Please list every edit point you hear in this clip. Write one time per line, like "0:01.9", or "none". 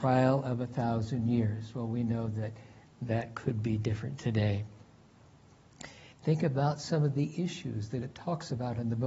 0:06.1

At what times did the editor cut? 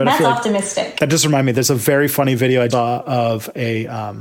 0:01.0
0:02.7

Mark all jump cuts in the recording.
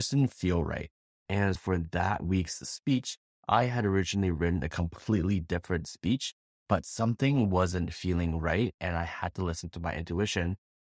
0:01.6

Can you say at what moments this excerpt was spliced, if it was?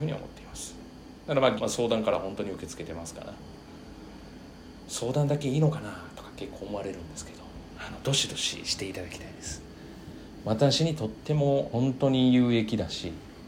0:01.6
0:11.7

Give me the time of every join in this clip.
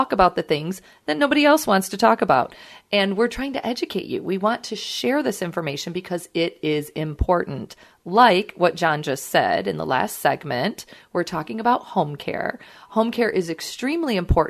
none

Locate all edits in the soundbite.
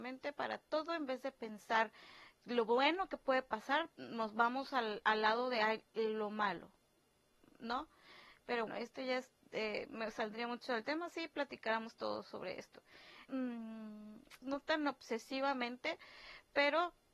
0:08.7
0:13.3
0:14.4

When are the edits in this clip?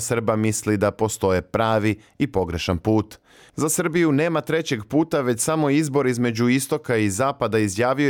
0:03.5

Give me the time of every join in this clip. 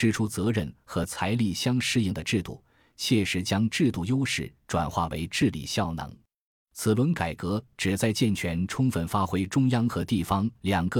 0:06.6

